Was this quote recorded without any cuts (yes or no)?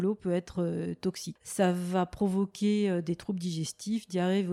yes